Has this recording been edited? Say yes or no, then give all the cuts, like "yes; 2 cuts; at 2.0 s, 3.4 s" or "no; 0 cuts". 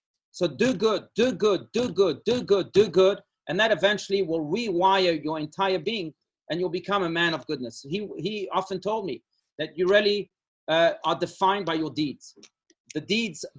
no; 0 cuts